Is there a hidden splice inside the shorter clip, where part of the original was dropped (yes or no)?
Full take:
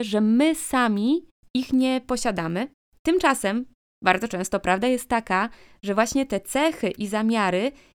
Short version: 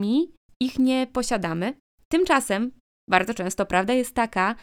no